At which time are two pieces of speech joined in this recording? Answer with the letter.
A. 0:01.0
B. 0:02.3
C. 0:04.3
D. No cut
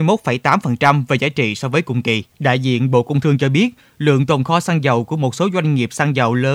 B